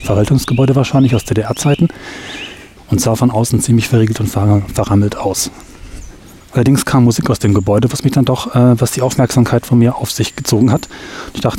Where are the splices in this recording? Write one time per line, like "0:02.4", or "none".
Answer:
0:02.8